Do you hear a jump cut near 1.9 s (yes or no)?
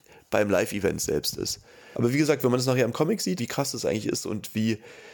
yes